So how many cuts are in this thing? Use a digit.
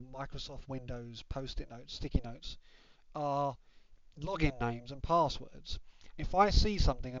1